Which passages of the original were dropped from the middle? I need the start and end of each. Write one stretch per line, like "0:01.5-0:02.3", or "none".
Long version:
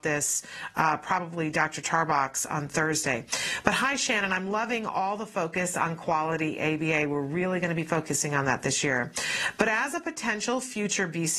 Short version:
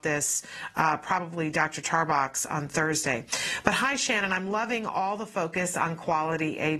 none